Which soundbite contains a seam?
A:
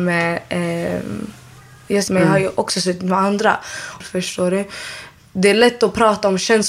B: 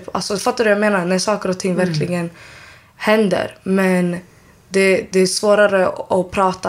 A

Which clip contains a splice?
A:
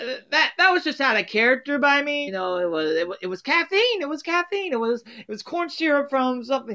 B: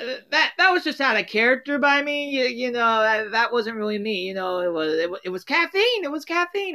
A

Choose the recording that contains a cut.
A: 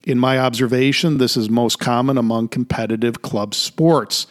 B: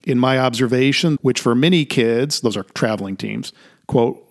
B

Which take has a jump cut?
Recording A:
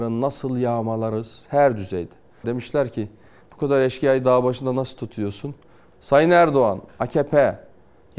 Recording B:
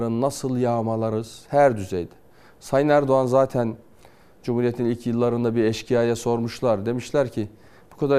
A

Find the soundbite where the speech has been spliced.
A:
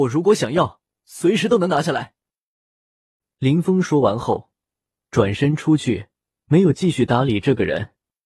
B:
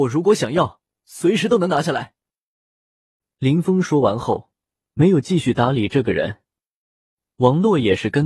B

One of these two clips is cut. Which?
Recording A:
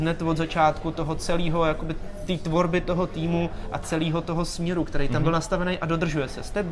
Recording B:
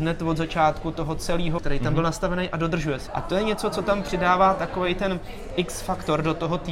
B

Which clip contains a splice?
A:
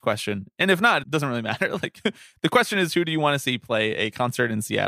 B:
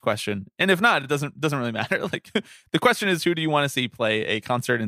A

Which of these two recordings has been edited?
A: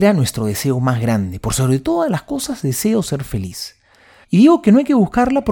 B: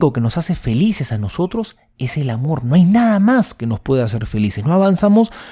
A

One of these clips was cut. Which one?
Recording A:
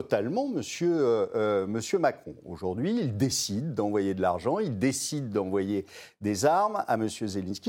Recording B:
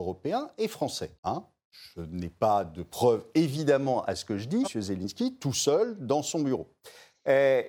B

